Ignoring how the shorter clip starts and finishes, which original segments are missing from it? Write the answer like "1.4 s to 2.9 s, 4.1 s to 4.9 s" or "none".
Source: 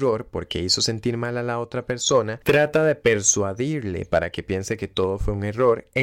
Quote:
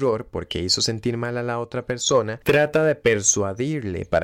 none

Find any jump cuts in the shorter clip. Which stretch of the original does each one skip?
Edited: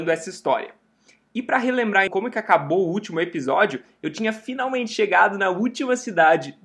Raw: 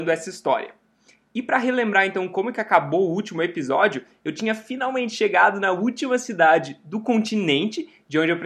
2.1 s to 2.3 s

